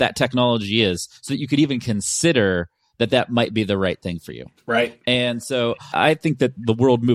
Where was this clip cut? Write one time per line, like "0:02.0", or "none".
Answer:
none